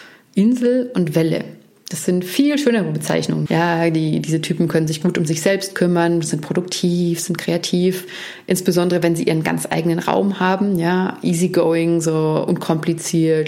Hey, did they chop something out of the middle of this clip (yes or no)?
yes